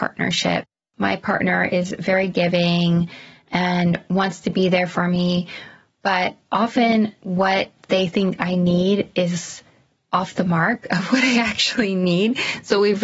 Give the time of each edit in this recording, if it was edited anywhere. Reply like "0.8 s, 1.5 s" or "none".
none